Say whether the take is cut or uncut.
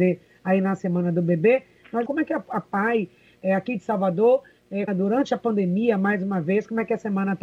cut